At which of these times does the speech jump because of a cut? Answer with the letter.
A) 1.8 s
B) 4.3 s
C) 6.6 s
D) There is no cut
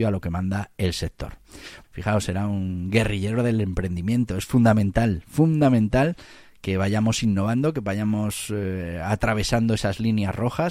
A